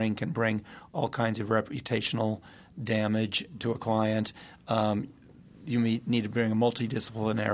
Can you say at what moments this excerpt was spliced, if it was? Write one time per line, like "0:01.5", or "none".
none